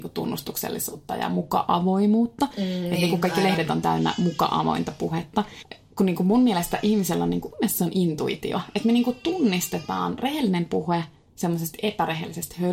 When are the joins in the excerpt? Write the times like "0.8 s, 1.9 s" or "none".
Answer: none